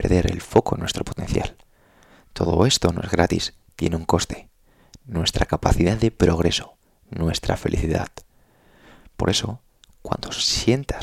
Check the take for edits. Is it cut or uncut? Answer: cut